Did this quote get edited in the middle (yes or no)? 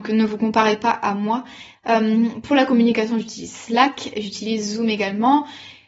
yes